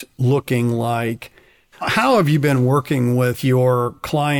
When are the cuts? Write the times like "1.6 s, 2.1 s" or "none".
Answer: 1.7 s

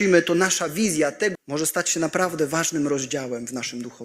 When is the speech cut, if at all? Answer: 1.4 s

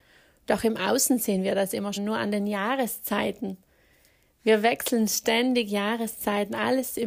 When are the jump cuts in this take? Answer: 2.0 s

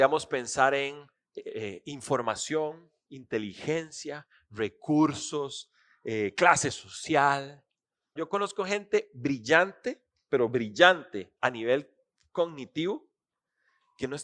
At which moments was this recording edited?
8.2 s, 11.4 s

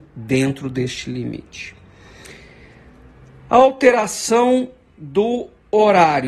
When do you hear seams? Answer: none

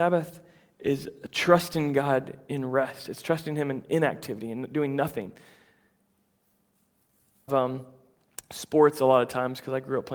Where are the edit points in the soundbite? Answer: 7.5 s

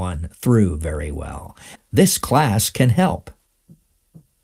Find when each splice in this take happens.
1.8 s

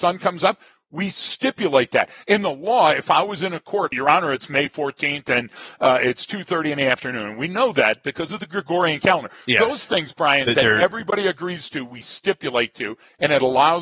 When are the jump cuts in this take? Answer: 3.9 s

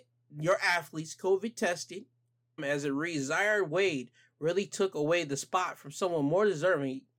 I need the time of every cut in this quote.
2.6 s

